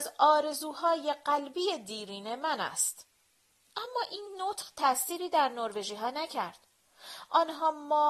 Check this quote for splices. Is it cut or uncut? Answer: uncut